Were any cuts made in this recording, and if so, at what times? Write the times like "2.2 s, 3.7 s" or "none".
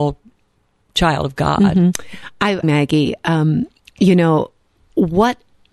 2.6 s